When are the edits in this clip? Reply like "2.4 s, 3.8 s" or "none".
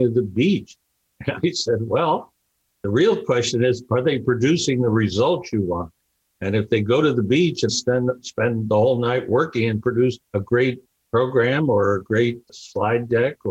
7.7 s, 10.3 s